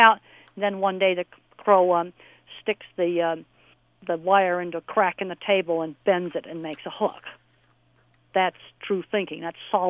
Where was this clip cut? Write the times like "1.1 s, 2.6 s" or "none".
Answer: none

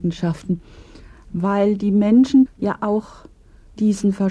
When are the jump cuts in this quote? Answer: 2.5 s

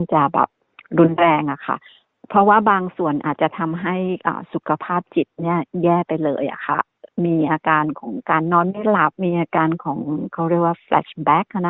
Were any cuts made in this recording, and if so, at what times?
9.1 s

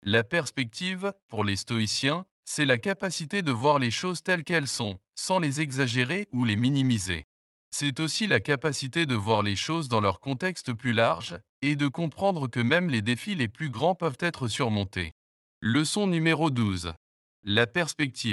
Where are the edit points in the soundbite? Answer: 15.5 s

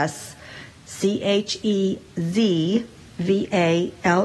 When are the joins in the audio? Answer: none

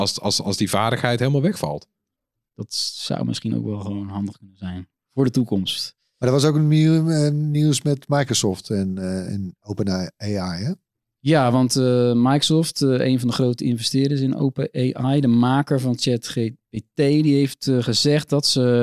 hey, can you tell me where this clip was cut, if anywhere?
2.4 s

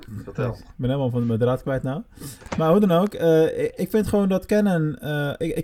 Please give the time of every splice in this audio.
none

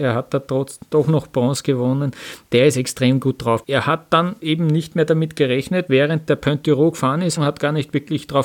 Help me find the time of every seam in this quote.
3.6 s, 5.9 s, 7.4 s

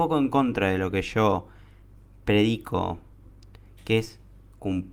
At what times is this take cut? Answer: none

